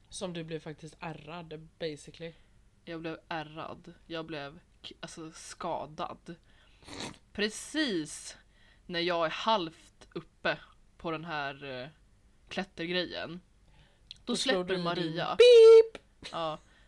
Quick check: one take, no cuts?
yes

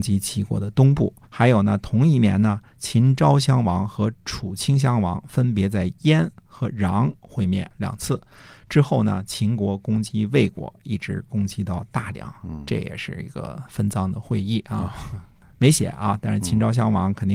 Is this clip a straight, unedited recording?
no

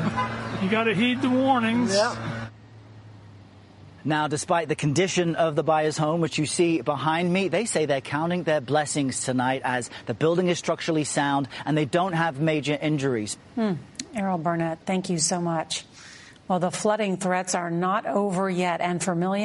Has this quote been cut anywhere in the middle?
yes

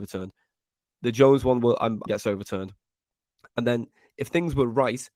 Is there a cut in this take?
yes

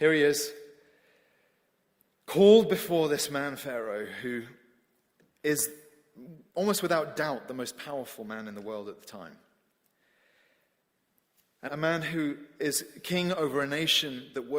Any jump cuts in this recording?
yes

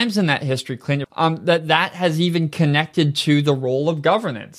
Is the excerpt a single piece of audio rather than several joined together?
no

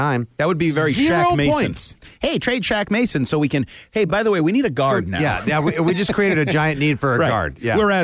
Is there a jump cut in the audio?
no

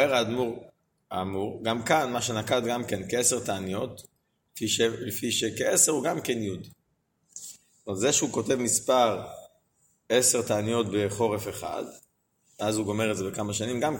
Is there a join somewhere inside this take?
no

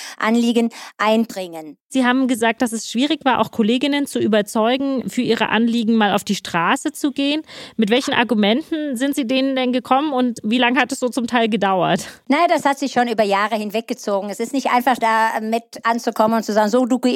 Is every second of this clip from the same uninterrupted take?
yes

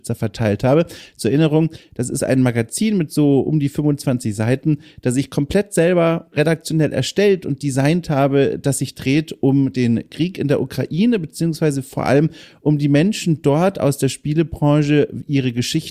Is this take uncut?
yes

